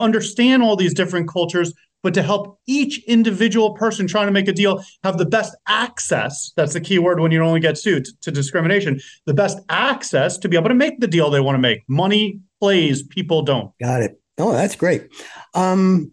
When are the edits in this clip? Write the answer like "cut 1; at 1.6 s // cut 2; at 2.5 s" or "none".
cut 1; at 13.7 s